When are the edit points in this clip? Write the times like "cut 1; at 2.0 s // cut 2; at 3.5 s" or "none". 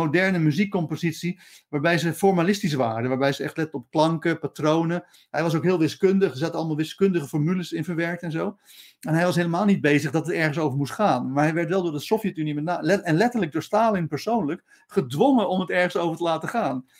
none